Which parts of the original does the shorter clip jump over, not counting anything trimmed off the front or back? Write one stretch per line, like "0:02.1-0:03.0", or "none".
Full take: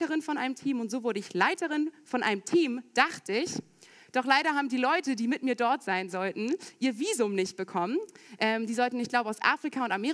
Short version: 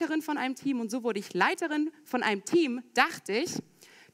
none